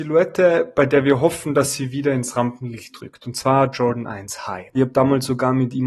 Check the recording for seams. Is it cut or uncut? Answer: cut